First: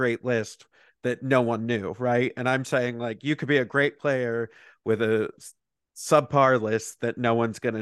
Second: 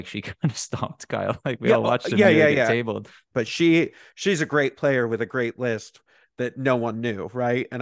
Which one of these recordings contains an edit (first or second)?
second